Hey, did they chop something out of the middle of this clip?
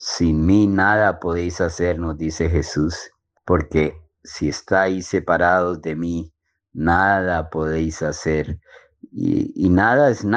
no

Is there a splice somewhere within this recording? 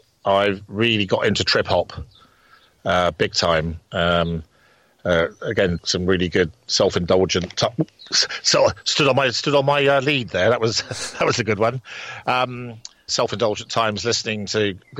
yes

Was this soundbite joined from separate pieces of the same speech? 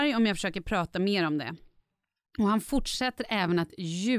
no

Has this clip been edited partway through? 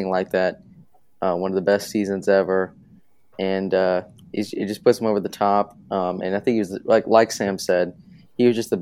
no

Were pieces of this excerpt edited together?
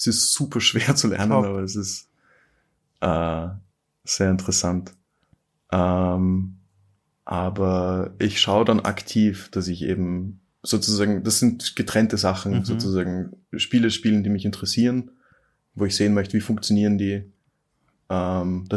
no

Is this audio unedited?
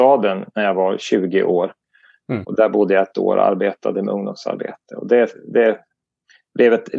yes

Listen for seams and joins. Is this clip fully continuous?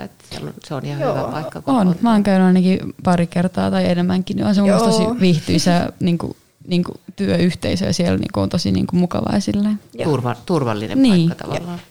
yes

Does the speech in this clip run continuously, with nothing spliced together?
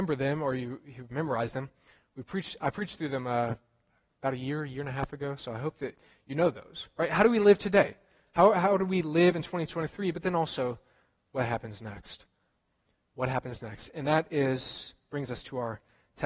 yes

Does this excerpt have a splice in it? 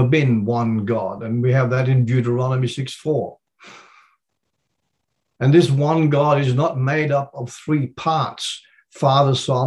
no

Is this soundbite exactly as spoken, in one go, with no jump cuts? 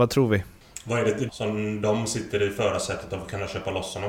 no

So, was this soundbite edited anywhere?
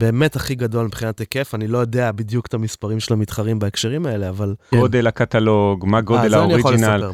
yes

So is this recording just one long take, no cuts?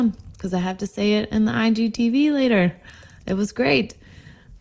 yes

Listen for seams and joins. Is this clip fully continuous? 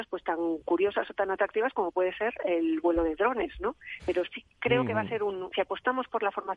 no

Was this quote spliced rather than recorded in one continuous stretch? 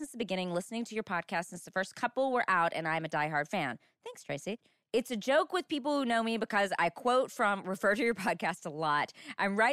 no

